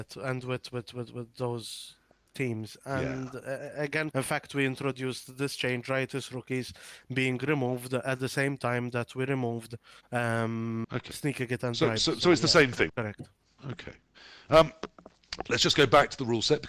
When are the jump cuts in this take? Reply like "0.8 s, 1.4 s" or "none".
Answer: 4.1 s, 10.8 s, 12.9 s